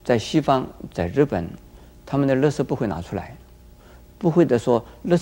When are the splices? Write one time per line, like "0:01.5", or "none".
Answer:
none